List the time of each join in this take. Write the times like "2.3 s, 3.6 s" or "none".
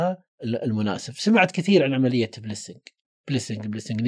none